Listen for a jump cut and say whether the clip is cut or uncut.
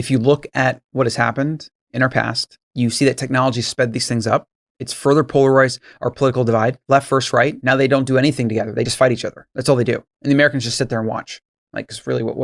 uncut